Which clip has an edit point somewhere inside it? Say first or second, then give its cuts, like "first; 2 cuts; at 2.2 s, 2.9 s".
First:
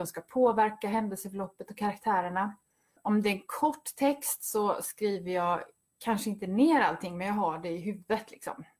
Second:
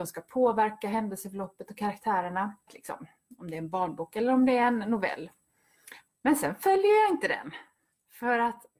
second; 2 cuts; at 2.7 s, 6.1 s